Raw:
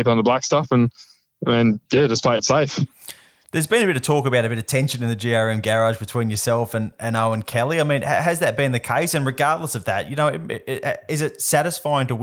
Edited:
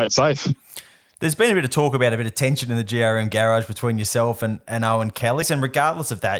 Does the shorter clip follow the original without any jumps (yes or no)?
no